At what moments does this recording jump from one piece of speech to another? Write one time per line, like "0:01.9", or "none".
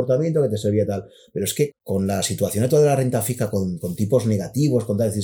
0:01.7